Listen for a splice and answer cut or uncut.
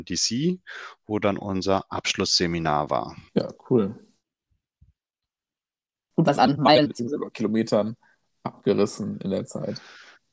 cut